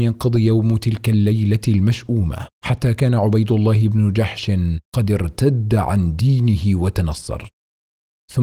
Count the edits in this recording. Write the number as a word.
two